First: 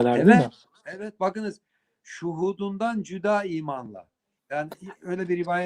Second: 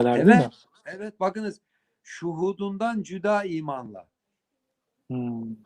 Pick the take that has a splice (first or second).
first